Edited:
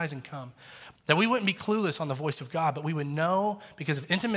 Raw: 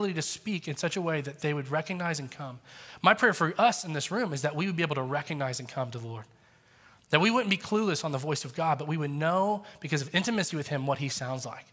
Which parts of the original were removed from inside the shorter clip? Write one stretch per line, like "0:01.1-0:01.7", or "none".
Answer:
0:03.0-0:07.0